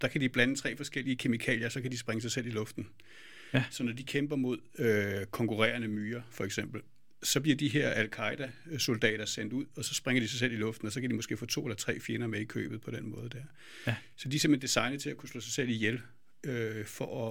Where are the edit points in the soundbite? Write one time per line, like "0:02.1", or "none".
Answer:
none

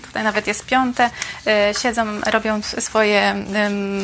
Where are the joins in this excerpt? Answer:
none

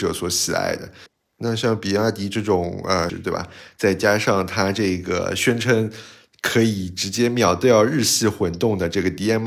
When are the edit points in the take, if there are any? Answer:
0:03.1

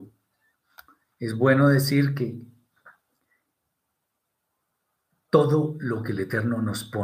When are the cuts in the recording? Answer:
none

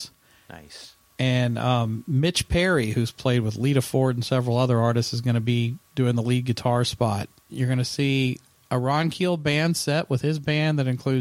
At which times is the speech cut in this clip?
0:07.5

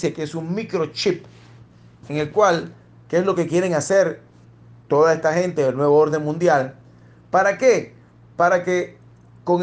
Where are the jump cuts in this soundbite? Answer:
none

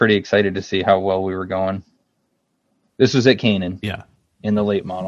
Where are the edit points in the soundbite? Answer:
0:02.9

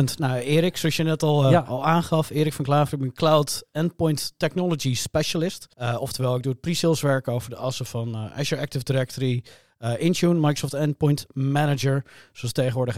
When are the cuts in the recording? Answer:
0:05.7

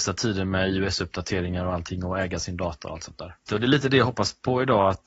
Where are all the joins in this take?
0:03.5

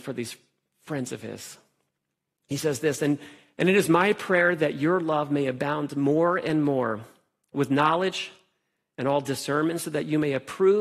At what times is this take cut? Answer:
none

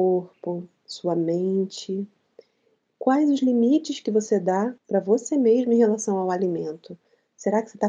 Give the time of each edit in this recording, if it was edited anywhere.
0:02.8
0:04.8

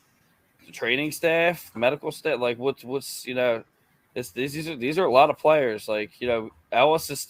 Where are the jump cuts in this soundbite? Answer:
none

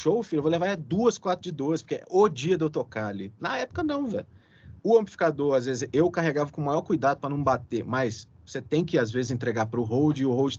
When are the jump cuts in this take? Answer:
0:04.8

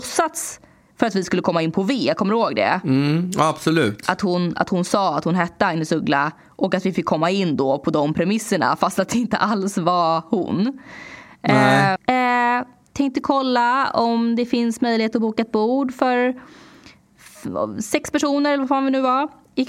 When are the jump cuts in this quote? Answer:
0:12.0

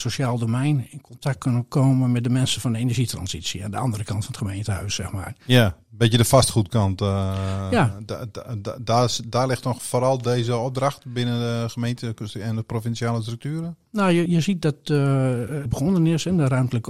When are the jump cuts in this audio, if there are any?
0:14.3
0:15.7

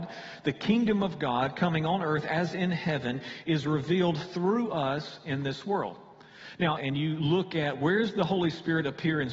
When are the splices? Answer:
0:06.8

